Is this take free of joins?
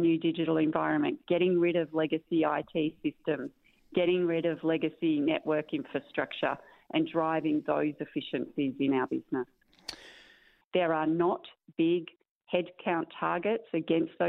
no; 1 cut; at 10.6 s

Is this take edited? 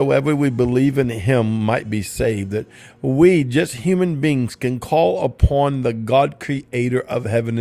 no; 0 cuts

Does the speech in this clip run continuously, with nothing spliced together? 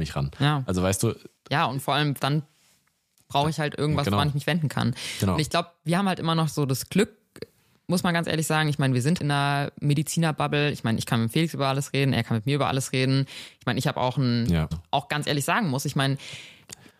no; 3 cuts; at 2.2 s, 9.2 s, 14.7 s

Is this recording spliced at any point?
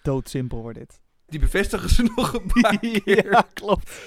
yes; 1 cut; at 1.3 s

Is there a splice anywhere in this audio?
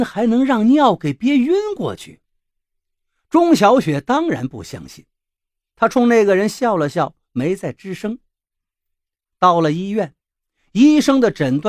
no; 0 cuts

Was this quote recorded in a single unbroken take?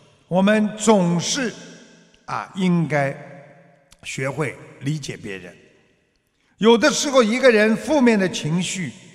yes; 0 cuts

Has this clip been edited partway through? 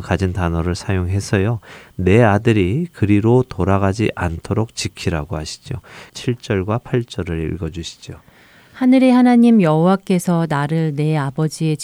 yes; 1 cut; at 6.1 s

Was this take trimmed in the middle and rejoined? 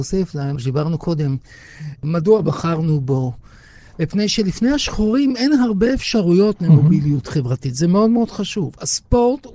no; 0 cuts

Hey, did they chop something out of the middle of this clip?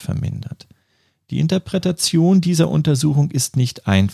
no; 0 cuts

